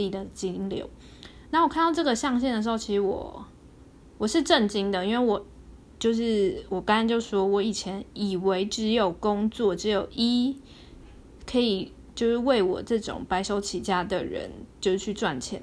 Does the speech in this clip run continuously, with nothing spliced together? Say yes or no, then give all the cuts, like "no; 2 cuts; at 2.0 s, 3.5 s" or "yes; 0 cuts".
yes; 0 cuts